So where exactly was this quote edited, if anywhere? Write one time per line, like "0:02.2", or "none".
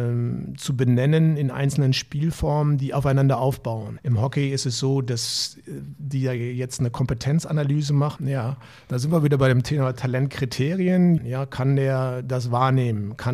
0:04.0
0:08.2
0:11.2